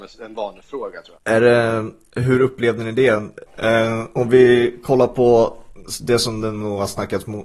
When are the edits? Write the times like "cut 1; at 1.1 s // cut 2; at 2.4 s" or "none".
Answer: cut 1; at 1.2 s // cut 2; at 3.5 s